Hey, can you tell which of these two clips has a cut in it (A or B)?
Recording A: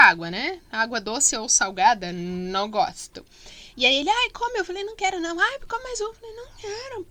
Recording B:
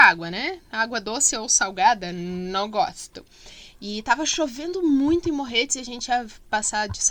A